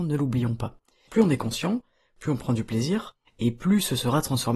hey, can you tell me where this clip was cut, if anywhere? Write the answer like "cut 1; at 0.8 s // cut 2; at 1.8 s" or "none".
cut 1; at 1.1 s // cut 2; at 3.3 s